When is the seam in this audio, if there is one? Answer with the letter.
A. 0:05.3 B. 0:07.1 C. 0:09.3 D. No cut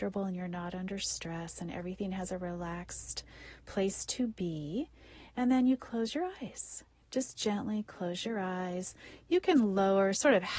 D